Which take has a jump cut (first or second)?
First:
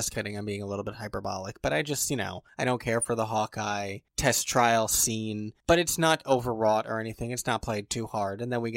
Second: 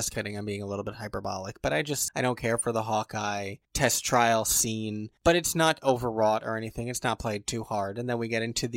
second